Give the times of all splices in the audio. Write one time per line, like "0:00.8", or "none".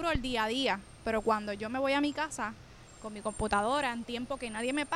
none